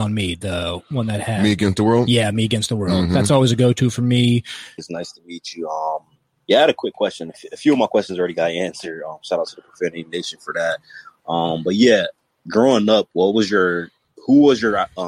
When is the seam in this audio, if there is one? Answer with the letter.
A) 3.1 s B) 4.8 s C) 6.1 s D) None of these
B